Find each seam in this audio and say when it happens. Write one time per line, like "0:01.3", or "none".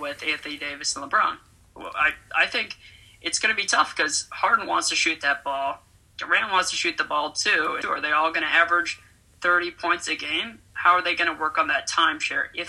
0:07.8